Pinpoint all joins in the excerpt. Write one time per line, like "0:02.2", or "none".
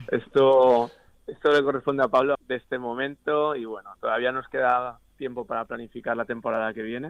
0:02.3